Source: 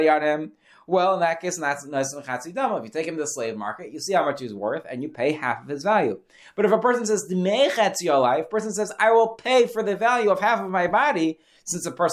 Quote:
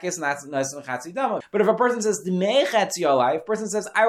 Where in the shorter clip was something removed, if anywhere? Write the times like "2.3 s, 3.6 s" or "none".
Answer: 1.4 s